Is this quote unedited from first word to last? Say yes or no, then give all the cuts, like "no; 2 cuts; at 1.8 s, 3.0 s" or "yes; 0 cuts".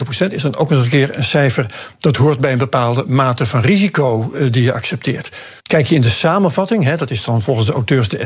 no; 1 cut; at 5.6 s